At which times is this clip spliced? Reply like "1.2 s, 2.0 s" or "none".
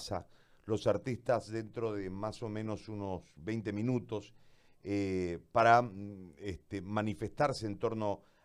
none